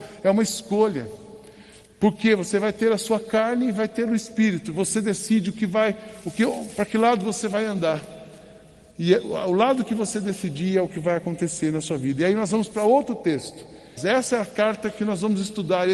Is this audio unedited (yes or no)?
no